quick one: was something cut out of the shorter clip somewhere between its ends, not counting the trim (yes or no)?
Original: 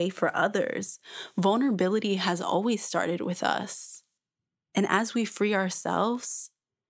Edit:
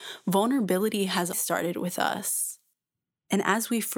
yes